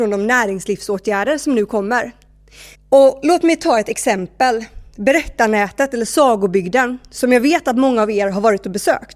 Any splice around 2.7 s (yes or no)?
yes